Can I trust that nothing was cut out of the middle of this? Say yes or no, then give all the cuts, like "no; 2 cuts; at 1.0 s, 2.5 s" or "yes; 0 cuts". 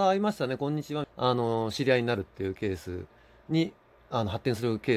no; 1 cut; at 1.0 s